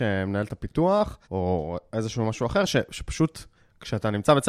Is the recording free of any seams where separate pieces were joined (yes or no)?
no